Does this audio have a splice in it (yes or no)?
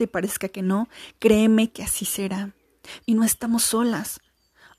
yes